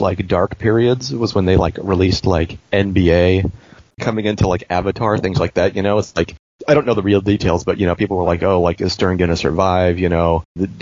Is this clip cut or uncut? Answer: uncut